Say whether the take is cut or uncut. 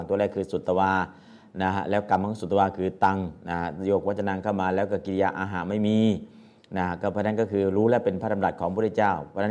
uncut